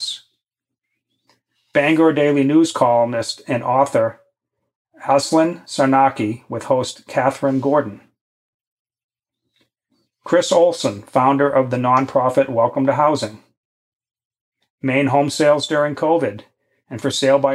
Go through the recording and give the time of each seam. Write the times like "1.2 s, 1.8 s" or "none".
14.6 s